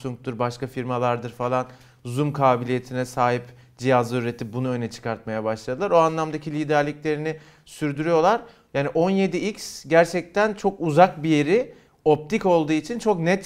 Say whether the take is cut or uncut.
uncut